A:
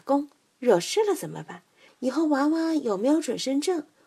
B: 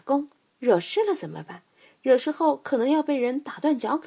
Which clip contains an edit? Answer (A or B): A